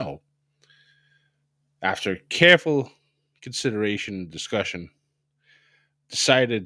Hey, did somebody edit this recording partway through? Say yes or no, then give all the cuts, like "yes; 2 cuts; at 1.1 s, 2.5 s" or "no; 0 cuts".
no; 0 cuts